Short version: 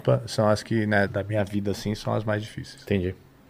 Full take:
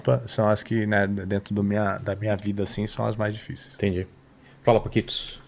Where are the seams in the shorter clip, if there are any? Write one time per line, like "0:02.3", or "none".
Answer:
0:01.1

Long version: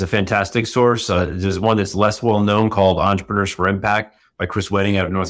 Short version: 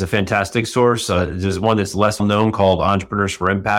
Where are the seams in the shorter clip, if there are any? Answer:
0:02.2

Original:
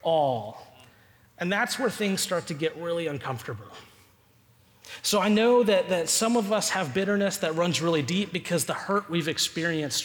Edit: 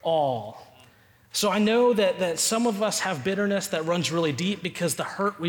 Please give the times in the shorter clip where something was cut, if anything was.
0:01.3

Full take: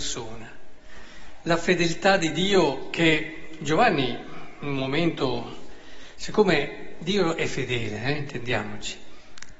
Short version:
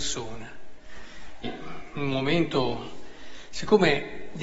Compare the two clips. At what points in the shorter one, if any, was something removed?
0:01.4

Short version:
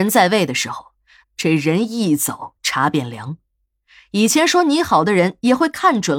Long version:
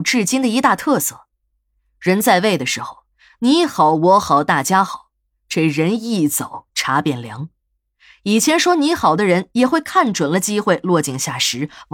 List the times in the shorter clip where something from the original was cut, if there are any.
0:01.2

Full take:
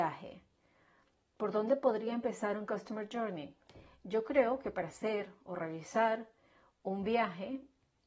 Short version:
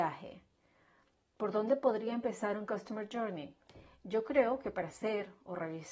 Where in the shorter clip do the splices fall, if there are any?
none

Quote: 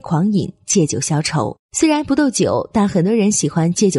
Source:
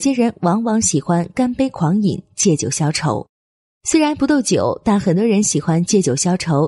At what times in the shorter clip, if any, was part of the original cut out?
0:01.6

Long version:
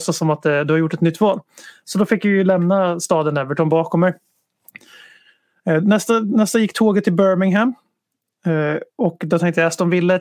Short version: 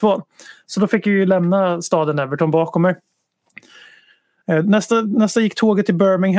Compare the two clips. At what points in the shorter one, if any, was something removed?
none

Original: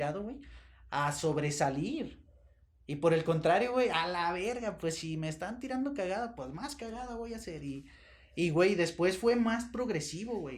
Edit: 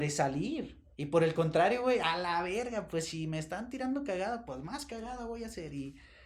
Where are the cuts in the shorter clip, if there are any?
0:00.9

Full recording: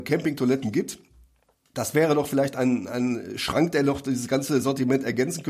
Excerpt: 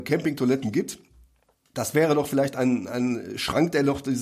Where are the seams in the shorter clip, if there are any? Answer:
none

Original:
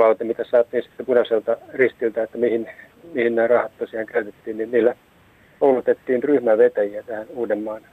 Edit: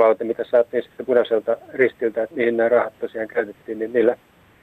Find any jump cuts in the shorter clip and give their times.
0:02.3

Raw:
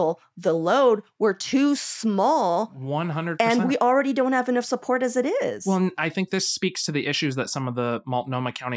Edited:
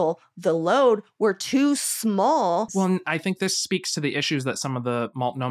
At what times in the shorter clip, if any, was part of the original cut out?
0:02.7

